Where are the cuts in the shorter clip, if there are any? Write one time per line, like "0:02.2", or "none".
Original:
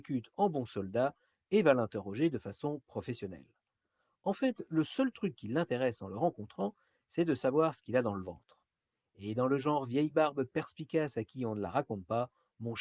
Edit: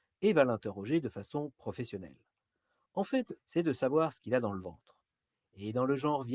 0:03.4